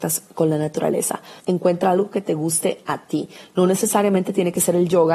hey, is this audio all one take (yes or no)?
no